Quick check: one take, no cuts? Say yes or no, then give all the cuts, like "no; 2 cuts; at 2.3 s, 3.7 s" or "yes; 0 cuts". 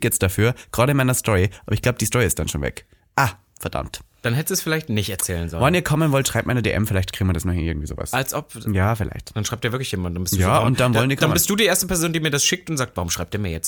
yes; 0 cuts